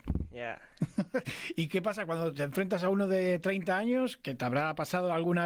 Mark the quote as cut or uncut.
uncut